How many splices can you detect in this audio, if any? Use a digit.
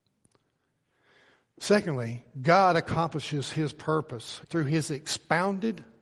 1